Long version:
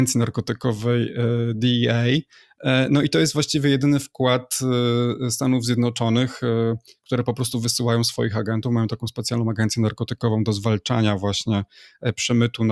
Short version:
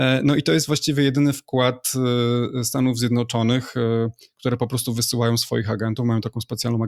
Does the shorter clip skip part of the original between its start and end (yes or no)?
no